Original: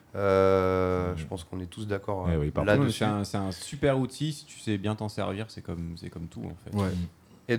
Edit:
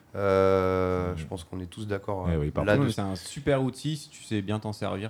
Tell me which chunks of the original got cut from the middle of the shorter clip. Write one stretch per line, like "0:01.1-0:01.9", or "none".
0:02.9-0:03.3